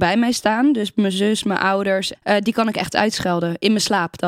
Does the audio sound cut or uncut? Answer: cut